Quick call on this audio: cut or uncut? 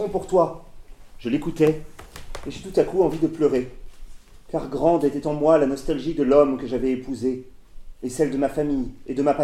cut